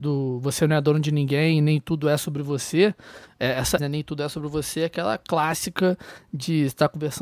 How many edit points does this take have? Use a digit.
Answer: 1